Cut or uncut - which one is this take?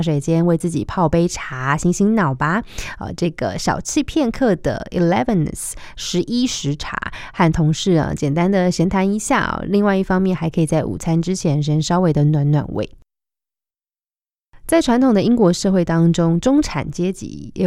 uncut